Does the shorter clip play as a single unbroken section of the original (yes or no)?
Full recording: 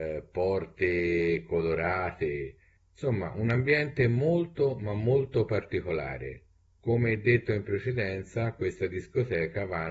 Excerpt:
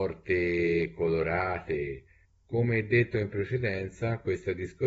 no